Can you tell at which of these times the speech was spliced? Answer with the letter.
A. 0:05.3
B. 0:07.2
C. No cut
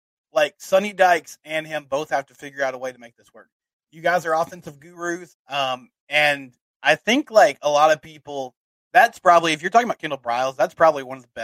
A